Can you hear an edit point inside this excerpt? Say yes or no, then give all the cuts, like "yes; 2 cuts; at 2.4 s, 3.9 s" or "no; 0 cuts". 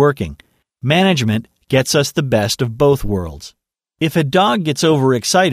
no; 0 cuts